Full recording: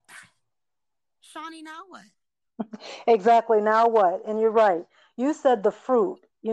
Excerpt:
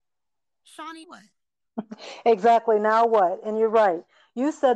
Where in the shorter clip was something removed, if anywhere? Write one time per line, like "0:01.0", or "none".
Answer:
0:01.0